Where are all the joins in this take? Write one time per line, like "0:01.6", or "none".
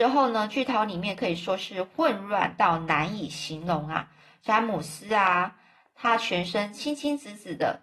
none